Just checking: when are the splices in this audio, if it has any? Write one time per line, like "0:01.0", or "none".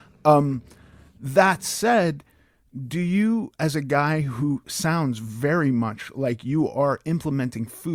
none